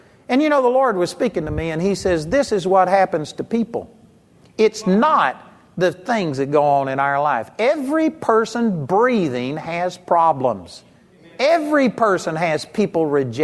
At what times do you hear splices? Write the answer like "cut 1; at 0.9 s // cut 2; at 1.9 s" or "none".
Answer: none